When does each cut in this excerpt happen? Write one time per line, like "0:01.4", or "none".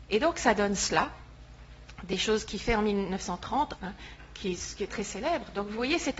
0:03.8
0:04.9